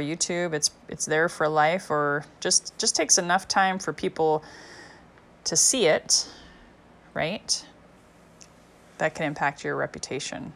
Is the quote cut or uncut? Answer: cut